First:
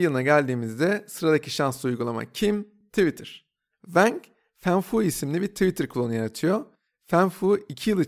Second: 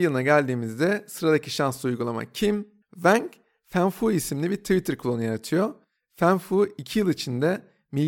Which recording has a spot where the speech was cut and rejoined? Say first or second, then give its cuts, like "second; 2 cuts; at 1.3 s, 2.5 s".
second; 1 cut; at 2.8 s